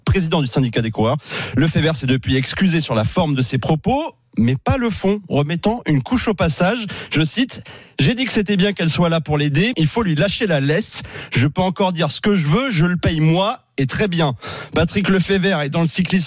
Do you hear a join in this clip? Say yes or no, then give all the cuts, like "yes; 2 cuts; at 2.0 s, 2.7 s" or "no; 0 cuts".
yes; 1 cut; at 9.7 s